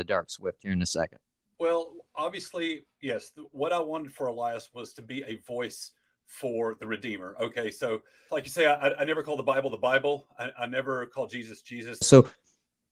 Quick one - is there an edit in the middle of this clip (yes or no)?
yes